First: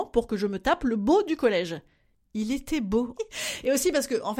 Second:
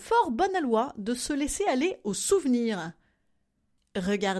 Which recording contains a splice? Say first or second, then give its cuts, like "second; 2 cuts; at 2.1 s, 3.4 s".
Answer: first; 1 cut; at 3.1 s